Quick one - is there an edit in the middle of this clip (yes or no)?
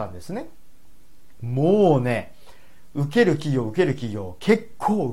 yes